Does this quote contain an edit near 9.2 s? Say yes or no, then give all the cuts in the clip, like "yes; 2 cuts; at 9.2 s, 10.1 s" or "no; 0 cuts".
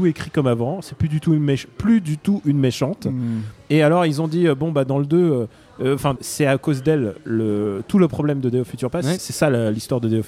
yes; 2 cuts; at 6.2 s, 9.2 s